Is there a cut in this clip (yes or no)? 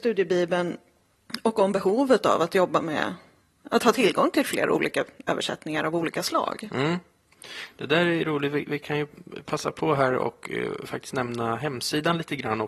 no